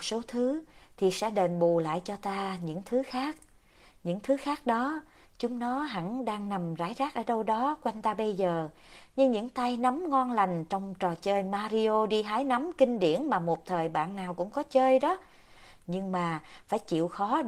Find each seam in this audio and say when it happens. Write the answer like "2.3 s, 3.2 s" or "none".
none